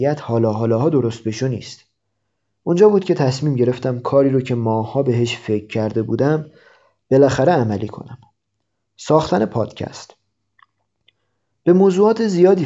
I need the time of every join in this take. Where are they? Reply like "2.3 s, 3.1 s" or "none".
none